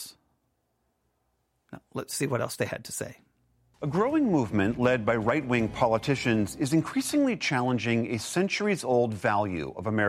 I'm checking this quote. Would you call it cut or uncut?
cut